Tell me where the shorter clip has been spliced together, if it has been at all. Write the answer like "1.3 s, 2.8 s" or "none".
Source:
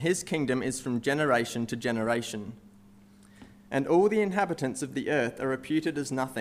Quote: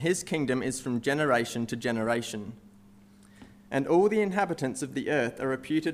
none